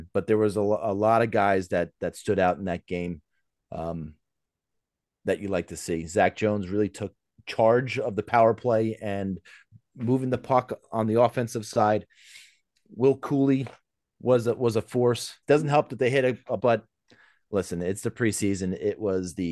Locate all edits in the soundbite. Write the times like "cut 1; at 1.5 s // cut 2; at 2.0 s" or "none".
cut 1; at 15.4 s // cut 2; at 16.6 s